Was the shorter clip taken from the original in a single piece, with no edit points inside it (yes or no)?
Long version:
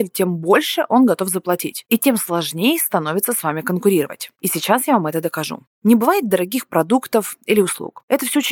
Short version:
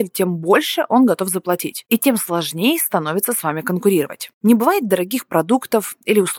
no